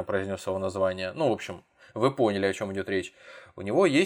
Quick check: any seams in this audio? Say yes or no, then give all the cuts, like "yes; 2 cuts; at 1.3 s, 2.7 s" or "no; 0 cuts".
no; 0 cuts